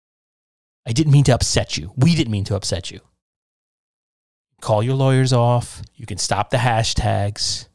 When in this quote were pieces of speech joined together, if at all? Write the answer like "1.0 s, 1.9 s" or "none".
5.9 s